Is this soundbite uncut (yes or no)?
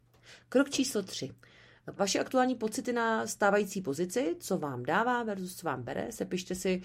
no